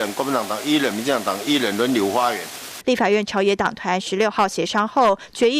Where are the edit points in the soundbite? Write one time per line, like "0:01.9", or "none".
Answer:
0:02.8